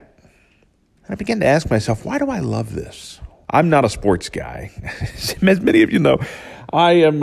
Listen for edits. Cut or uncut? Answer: cut